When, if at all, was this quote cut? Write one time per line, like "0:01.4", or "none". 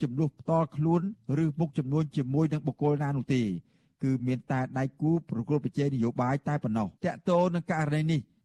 0:07.0